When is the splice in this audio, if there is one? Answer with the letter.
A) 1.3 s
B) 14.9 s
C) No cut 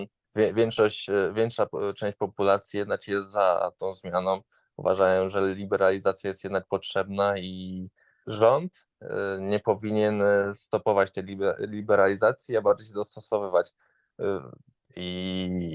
B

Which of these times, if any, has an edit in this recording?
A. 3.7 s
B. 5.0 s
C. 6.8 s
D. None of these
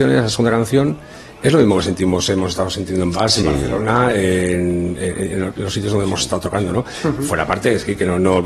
D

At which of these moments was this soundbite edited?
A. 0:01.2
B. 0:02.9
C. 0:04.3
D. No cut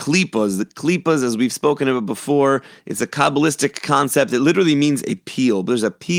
D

